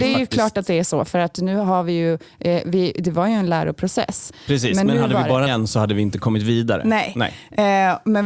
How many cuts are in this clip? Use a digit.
2